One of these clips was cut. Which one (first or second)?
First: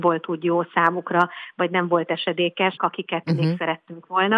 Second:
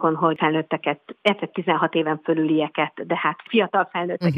first